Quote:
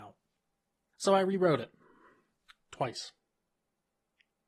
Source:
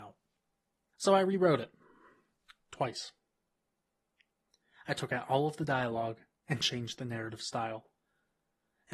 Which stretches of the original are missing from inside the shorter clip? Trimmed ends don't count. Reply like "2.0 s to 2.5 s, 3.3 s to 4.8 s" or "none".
none

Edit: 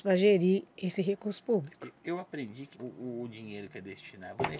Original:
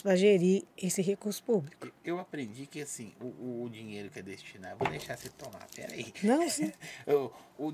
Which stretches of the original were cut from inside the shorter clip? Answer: 2.7 s to 3.1 s

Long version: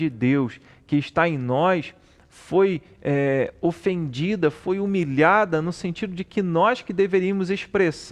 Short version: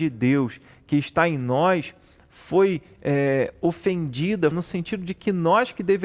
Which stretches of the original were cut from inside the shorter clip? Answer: 4.5 s to 5.6 s

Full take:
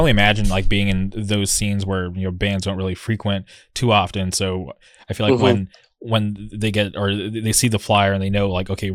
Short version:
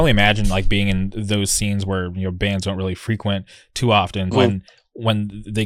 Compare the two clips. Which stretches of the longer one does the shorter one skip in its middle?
4.3 s to 5.4 s

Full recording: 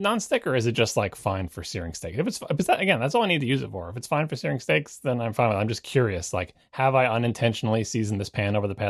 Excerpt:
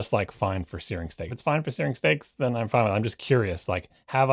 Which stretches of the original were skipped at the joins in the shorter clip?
2.1 s to 3.9 s

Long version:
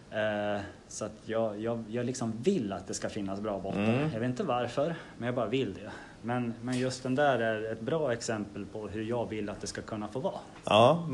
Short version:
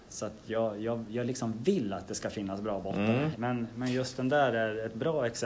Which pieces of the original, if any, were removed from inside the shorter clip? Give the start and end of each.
4.1 s to 6.2 s

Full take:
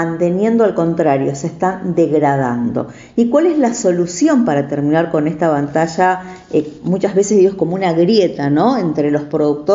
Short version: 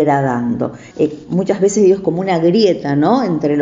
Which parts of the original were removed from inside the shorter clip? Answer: 3.1 s to 6.4 s

